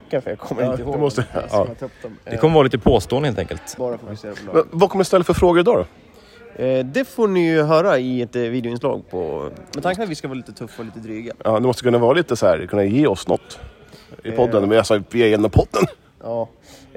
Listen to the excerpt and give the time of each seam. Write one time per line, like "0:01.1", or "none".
0:03.8